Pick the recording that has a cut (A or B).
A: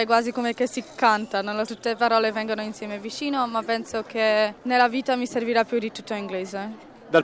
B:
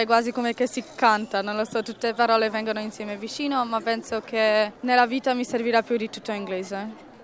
A